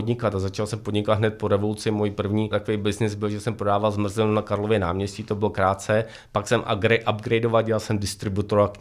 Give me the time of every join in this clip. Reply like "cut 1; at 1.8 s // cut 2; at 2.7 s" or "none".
cut 1; at 2.5 s // cut 2; at 6.3 s